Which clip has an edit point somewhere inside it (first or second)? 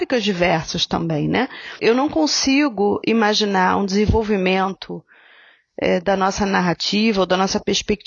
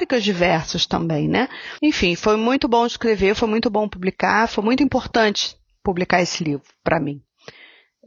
second